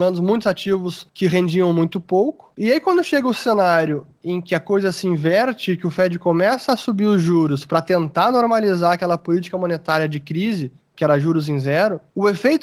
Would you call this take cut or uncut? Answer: uncut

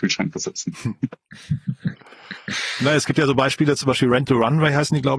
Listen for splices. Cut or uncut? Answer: uncut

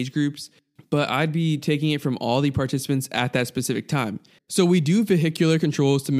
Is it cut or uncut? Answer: cut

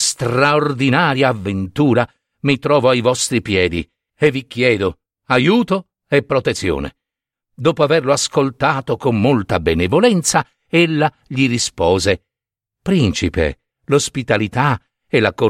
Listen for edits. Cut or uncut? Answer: cut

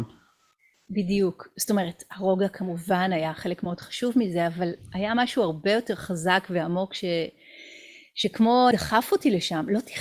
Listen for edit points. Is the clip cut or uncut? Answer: cut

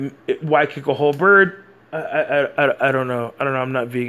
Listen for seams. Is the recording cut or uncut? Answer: cut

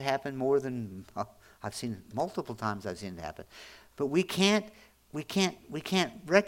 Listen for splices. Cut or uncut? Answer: cut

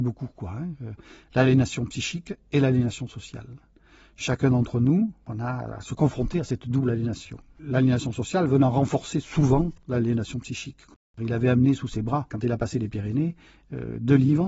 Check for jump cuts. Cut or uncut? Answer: uncut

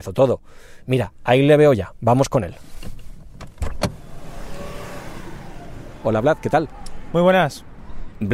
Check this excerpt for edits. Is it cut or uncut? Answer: uncut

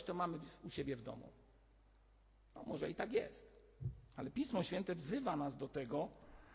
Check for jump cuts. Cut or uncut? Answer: uncut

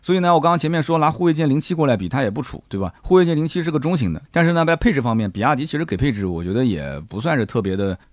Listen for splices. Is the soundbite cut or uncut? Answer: cut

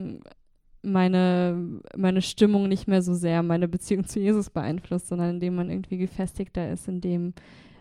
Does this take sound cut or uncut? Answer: uncut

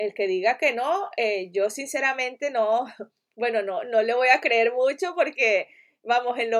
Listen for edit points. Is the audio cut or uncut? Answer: uncut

